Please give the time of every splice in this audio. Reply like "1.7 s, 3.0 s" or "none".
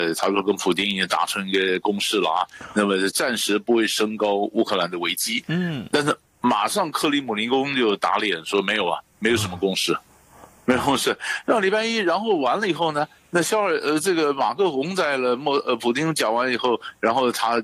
11.4 s